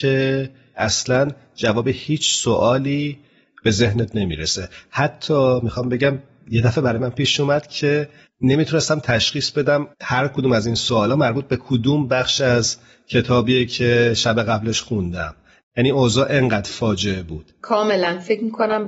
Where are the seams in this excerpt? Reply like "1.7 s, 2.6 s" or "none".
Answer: 9.9 s

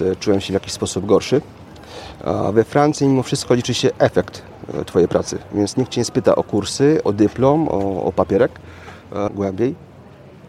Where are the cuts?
7.0 s, 9.3 s

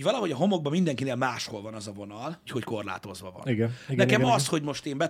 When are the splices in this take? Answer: 2.5 s

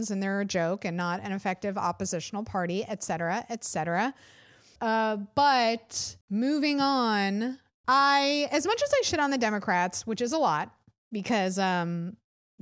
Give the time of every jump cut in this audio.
4.8 s, 6.2 s, 7.8 s

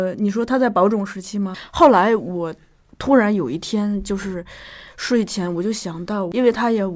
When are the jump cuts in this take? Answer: 1.5 s

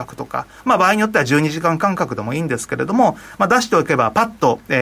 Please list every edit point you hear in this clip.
none

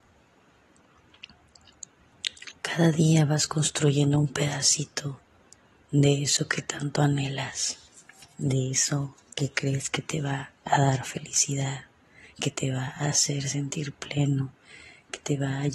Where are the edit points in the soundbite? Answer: 2.5 s

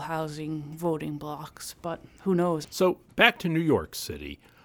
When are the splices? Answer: 2.6 s

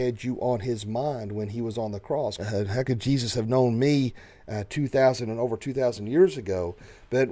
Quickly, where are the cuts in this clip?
2.4 s

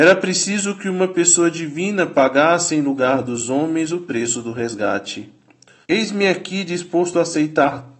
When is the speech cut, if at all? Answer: 5.8 s

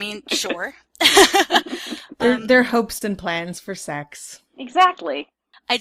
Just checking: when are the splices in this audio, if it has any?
3.0 s

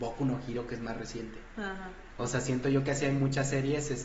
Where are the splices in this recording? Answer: none

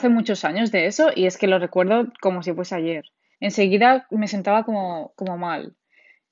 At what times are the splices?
3.3 s

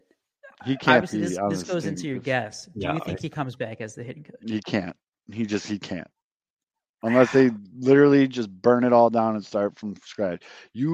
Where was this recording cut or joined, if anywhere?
none

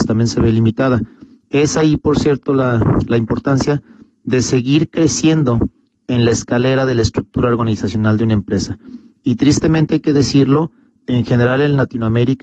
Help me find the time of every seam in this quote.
none

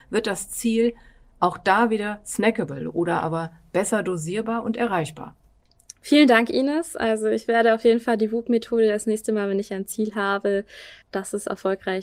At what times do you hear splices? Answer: 11.0 s

